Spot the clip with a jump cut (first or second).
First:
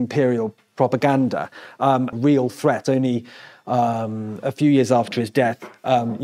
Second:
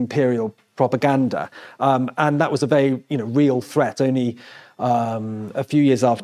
first